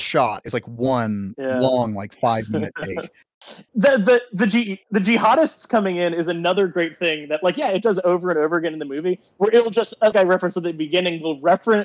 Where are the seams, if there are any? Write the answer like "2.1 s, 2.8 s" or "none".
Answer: 3.7 s, 10.1 s

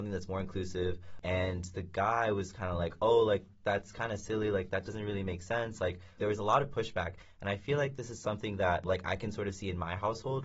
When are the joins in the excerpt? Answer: 6.2 s

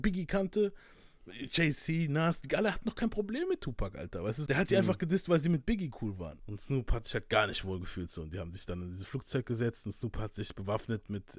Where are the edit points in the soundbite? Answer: 4.5 s, 6.4 s

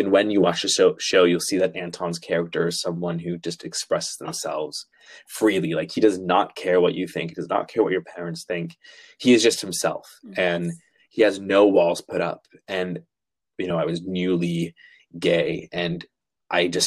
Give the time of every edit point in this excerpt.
13.7 s

